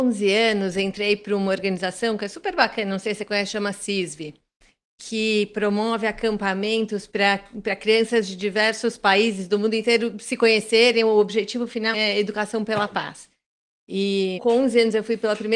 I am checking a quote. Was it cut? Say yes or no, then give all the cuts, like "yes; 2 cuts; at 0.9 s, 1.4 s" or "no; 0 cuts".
yes; 2 cuts; at 11.9 s, 14.4 s